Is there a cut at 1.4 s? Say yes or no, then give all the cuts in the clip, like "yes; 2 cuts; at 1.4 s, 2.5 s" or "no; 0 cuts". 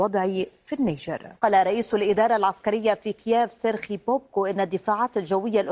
yes; 1 cut; at 1.4 s